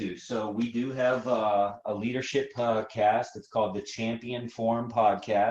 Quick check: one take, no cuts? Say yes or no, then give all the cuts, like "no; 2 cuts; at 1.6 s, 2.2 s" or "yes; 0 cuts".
yes; 0 cuts